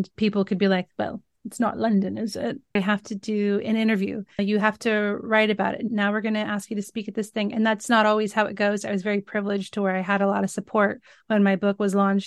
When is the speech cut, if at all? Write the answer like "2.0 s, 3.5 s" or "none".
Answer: 2.8 s, 4.4 s